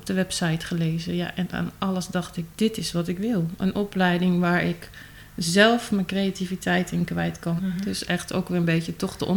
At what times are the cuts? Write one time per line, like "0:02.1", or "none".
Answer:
0:07.6